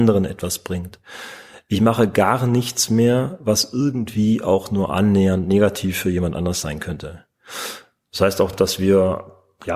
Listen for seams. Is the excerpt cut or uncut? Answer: uncut